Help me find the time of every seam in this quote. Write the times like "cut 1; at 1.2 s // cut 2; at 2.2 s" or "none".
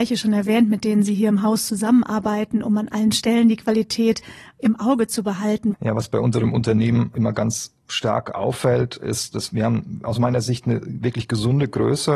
cut 1; at 5.7 s